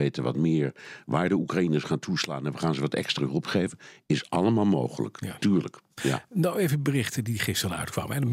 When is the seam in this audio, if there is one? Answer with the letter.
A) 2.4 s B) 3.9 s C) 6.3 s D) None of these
D